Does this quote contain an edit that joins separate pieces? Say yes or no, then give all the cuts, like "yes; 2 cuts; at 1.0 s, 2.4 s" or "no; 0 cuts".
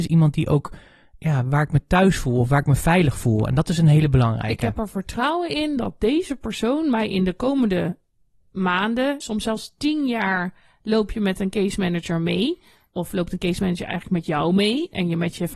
yes; 1 cut; at 9.2 s